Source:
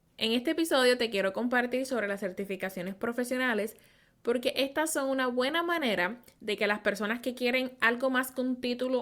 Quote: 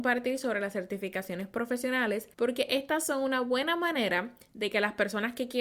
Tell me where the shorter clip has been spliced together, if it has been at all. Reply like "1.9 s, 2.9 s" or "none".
2.3 s